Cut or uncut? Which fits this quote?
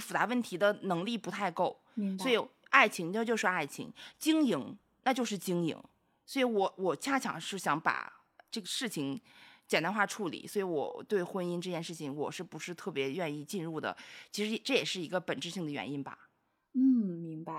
cut